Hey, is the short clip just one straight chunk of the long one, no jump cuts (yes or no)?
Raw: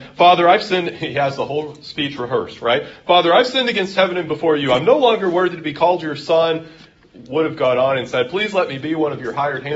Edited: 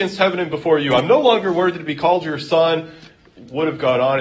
yes